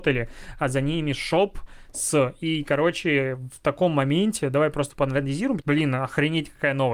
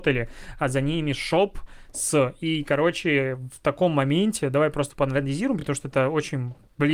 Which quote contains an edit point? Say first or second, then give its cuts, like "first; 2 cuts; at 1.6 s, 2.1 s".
first; 1 cut; at 5.6 s